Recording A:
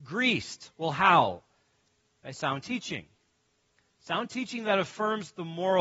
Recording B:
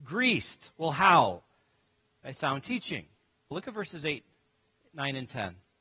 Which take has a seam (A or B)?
B